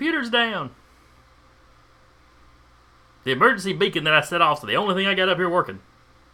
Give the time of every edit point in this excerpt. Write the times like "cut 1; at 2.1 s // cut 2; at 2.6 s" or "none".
none